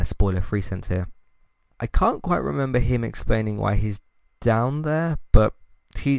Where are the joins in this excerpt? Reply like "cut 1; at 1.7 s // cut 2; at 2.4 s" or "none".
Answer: cut 1; at 1.7 s